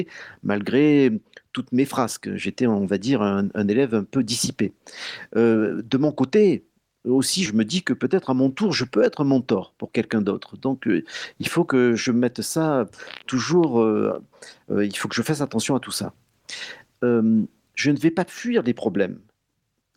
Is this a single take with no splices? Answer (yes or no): no